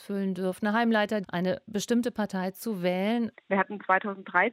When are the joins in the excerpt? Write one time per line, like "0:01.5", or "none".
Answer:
0:01.2
0:03.3